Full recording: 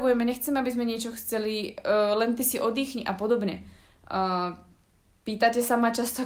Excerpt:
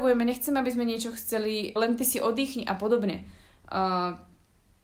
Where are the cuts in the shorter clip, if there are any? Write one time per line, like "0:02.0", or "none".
0:01.8